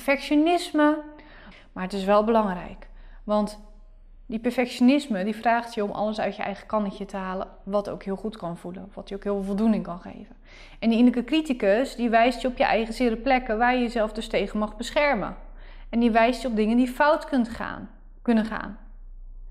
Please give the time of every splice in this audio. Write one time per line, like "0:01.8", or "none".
0:01.5